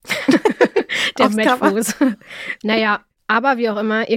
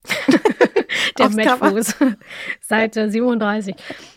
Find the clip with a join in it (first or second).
first